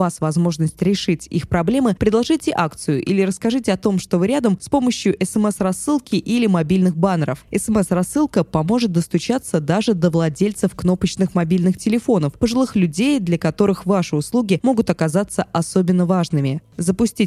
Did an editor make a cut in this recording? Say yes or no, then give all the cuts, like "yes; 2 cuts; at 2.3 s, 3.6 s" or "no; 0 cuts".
no; 0 cuts